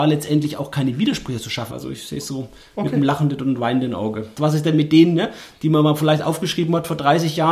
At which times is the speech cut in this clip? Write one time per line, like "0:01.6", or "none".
0:01.7
0:04.4